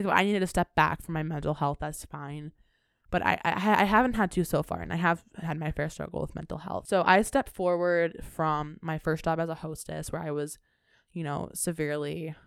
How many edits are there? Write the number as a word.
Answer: zero